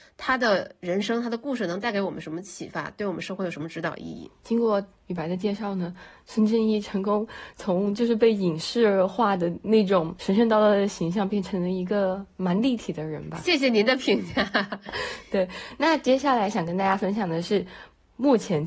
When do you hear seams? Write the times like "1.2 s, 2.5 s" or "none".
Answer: none